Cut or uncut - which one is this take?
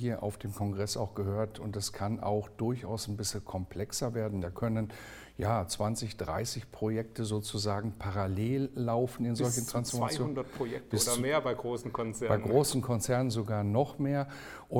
uncut